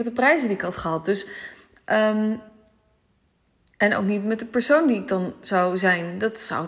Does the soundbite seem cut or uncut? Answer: uncut